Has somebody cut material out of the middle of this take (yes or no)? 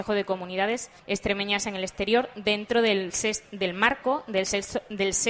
yes